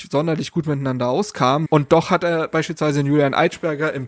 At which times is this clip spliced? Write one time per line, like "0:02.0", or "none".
0:01.7